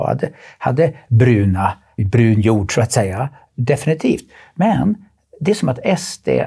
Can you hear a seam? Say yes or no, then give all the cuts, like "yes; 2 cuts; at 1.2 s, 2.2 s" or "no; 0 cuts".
yes; 1 cut; at 2.0 s